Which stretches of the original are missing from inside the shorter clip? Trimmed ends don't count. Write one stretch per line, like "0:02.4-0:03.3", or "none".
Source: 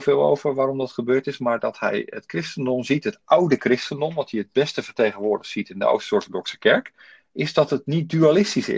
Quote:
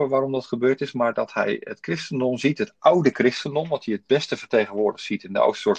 none